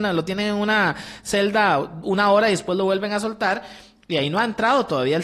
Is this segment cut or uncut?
uncut